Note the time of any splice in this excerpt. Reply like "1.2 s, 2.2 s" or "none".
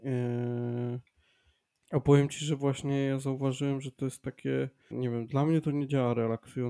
1.7 s, 4.9 s